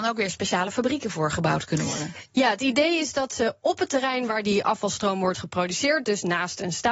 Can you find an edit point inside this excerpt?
no; 0 cuts

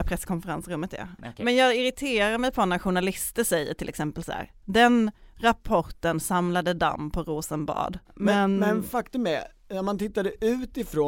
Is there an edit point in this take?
yes; 2 cuts; at 1.2 s, 8.1 s

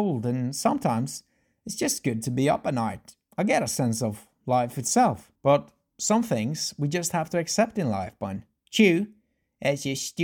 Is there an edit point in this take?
yes; 1 cut; at 5.4 s

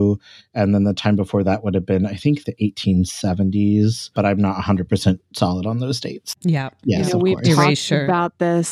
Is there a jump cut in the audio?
yes; 2 cuts; at 2.4 s, 6.4 s

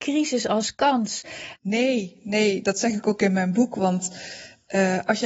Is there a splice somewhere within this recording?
yes; 1 cut; at 1.6 s

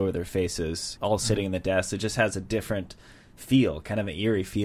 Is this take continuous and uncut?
no; 1 cut; at 1.0 s

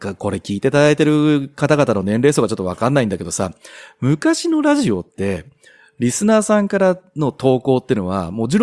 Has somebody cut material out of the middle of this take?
no; 0 cuts

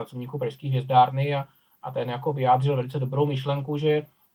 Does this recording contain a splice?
no; 0 cuts

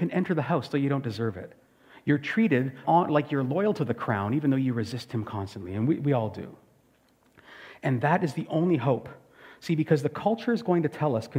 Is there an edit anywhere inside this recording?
yes; 1 cut; at 2.8 s

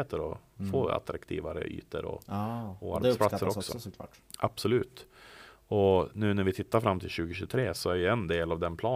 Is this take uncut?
yes; 0 cuts

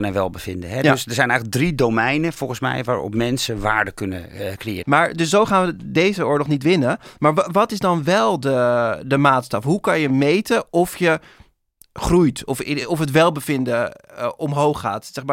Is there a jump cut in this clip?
yes; 1 cut; at 4.8 s

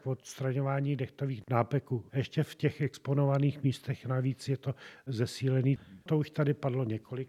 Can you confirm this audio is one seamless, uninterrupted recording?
no; 2 cuts; at 2.1 s, 6.0 s

